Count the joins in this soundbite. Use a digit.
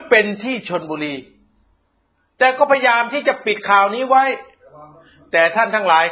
0